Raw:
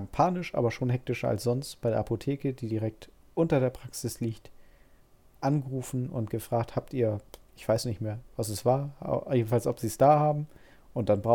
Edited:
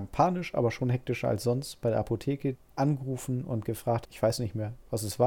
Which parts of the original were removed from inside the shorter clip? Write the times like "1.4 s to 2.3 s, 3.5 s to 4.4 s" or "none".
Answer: 2.5 s to 5.2 s, 6.7 s to 7.5 s